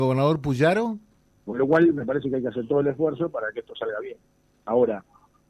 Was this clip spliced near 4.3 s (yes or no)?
no